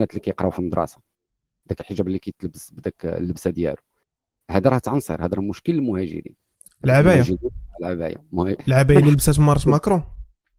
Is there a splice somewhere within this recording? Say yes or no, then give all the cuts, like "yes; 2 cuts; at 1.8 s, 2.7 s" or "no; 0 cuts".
no; 0 cuts